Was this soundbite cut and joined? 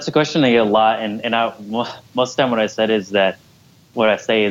no; 0 cuts

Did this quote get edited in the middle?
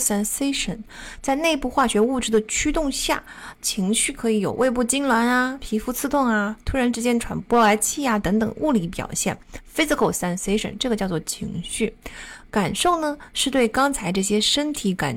no; 0 cuts

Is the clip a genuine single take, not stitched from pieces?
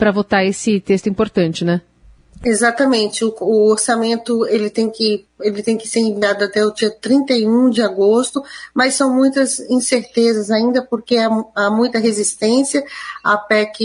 no; 1 cut; at 5.3 s

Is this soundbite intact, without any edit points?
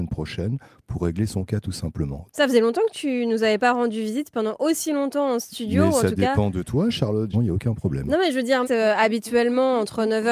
no; 3 cuts; at 2.3 s, 7.3 s, 8.6 s

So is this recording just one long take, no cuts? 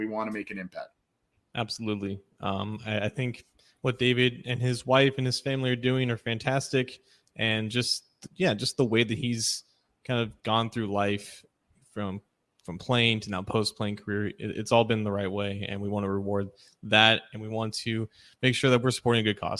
yes; 0 cuts

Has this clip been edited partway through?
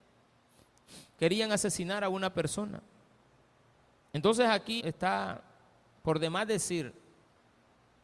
yes; 1 cut; at 4.8 s

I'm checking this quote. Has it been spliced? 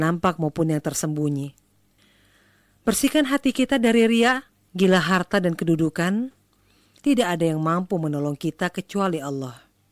yes; 2 cuts; at 4.7 s, 7.0 s

